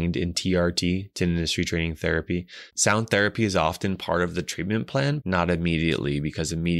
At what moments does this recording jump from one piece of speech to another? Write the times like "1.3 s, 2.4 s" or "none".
2.7 s, 5.2 s

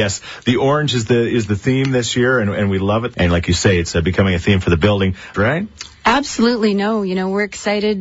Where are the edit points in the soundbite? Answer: 3.1 s, 5.3 s

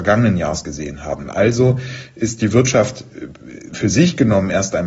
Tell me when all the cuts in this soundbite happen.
none

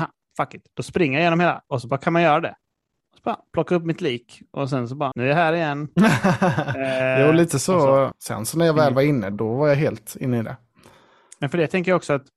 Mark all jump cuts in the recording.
5.1 s, 8.1 s, 9.3 s

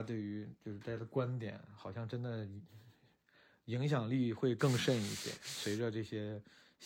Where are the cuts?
none

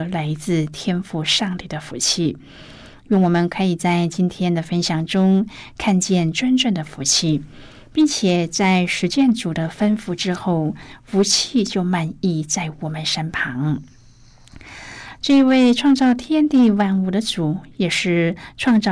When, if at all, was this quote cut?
15.2 s

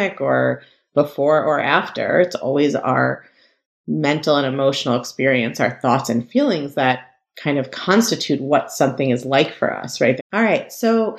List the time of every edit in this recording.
10.2 s

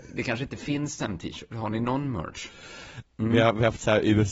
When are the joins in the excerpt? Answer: 3.0 s

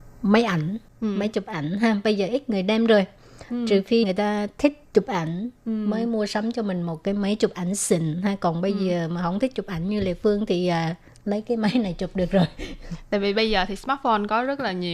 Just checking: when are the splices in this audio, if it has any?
4.0 s

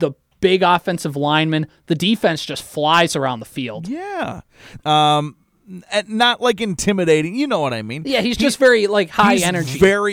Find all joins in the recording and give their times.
4.8 s

